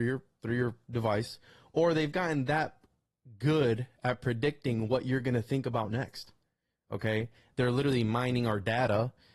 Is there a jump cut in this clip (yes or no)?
yes